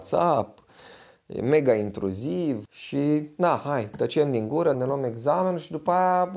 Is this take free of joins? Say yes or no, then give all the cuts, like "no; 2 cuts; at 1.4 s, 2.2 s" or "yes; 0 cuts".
no; 2 cuts; at 2.7 s, 4.7 s